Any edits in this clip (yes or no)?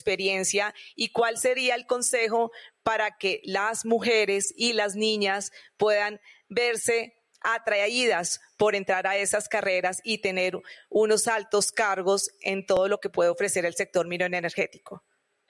no